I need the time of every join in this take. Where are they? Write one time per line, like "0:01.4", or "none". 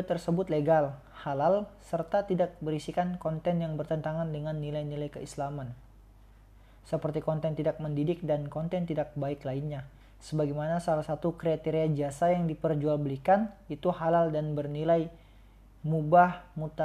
none